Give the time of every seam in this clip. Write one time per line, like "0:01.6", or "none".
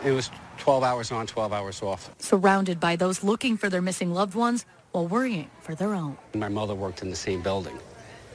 none